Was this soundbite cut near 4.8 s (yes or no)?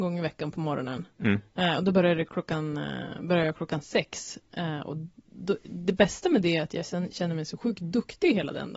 no